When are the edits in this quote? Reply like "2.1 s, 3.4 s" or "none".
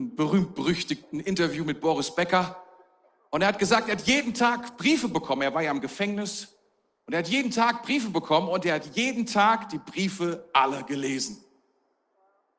none